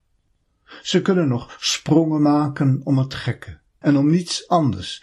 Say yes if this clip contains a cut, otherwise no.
yes